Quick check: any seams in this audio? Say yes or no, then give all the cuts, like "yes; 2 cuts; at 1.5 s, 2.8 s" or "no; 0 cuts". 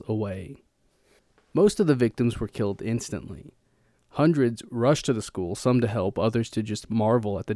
no; 0 cuts